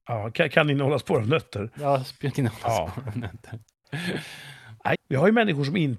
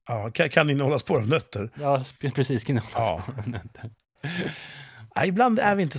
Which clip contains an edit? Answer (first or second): first